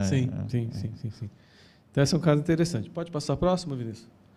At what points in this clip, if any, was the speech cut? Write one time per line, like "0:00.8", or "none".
none